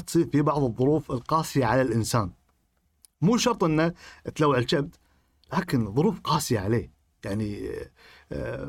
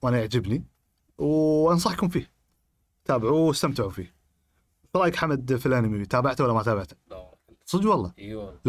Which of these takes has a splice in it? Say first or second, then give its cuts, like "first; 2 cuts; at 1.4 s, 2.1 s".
second; 1 cut; at 6.9 s